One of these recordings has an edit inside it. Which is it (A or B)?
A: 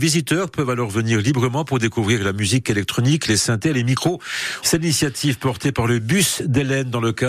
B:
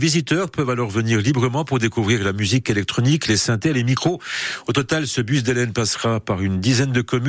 A